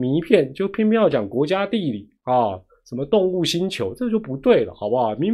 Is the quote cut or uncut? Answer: uncut